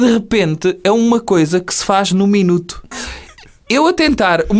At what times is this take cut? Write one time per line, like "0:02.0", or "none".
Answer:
0:02.9